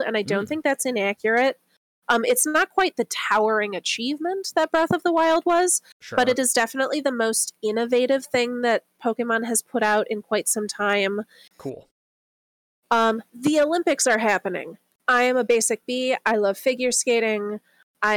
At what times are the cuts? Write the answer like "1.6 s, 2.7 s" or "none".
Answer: 11.5 s, 13.3 s